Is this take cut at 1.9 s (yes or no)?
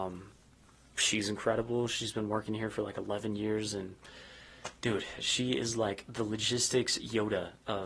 no